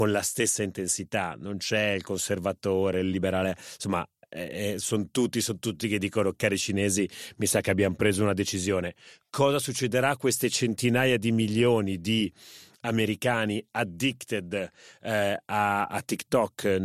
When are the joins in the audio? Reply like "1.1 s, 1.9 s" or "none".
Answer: none